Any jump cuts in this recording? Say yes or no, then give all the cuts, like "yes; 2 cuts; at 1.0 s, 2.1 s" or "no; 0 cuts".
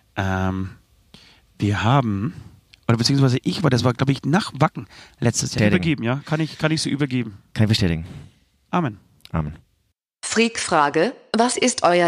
yes; 1 cut; at 5.6 s